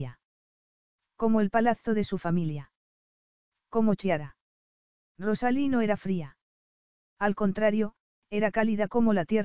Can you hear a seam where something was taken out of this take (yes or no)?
no